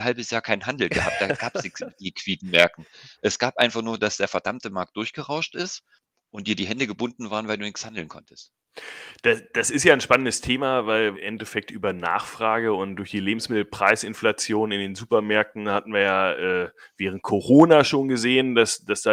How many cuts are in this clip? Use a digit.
1